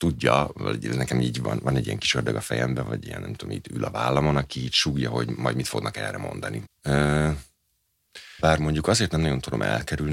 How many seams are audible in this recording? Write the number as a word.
two